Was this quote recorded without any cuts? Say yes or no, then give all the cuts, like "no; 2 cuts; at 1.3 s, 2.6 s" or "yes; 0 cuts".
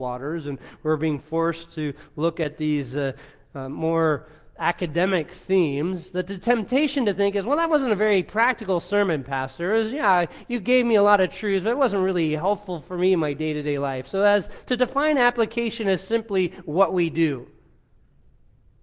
yes; 0 cuts